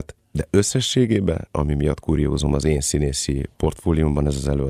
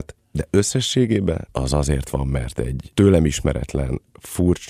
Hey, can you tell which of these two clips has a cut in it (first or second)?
second